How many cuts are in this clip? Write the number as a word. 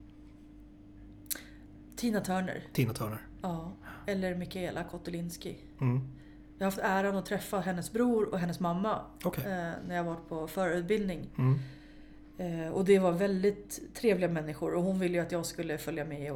zero